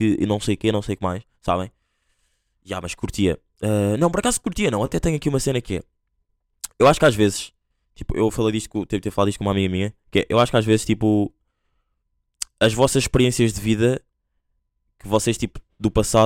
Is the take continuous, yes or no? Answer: yes